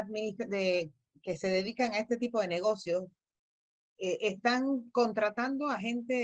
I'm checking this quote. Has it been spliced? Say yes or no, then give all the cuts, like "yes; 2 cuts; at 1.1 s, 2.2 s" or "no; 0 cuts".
no; 0 cuts